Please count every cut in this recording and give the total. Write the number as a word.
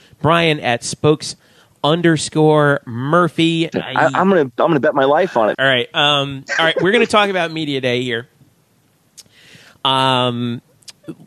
two